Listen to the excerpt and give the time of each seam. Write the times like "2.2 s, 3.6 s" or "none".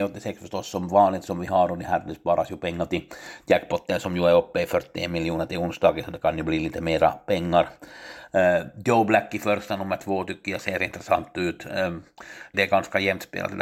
12.5 s